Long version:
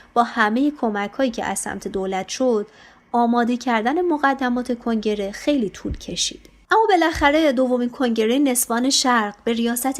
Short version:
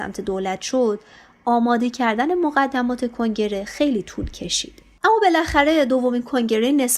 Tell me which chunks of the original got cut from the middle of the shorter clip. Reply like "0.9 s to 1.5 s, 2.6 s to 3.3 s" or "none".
none